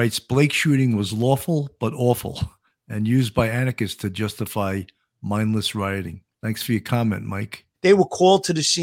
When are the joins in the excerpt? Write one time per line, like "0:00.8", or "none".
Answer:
0:06.3
0:07.7